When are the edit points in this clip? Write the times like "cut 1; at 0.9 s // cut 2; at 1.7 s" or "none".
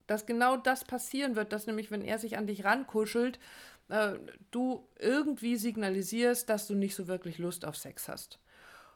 none